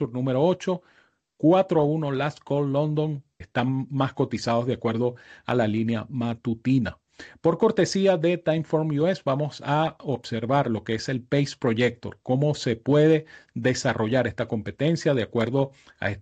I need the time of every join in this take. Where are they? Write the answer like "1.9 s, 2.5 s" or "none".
3.4 s

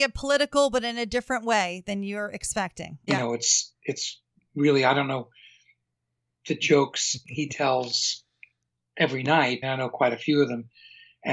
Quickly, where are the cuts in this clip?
3.1 s, 9.6 s

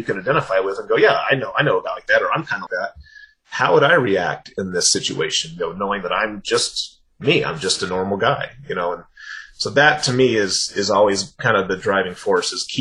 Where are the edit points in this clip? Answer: 2.7 s

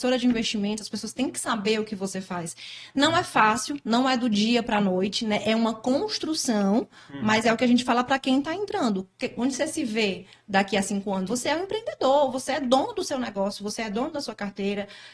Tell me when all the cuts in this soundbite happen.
11.3 s

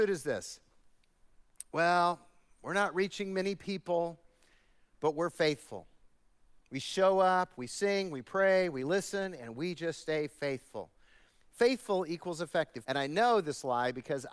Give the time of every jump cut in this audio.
11.4 s, 12.8 s

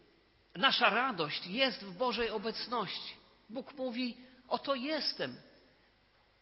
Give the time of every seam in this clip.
none

